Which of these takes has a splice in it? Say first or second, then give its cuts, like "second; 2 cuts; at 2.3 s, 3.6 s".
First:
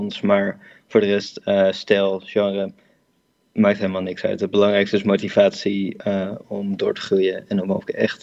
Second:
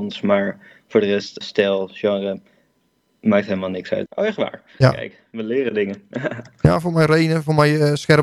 second; 2 cuts; at 1.4 s, 4.1 s